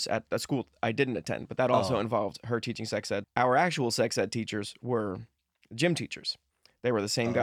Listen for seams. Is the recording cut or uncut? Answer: cut